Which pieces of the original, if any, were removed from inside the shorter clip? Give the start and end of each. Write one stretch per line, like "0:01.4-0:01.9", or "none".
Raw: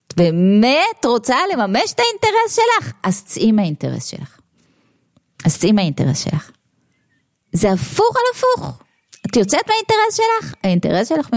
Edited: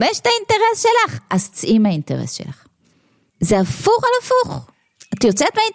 0:05.0-0:07.4